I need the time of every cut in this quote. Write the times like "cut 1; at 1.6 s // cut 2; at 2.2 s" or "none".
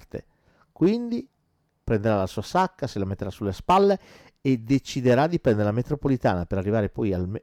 cut 1; at 1.8 s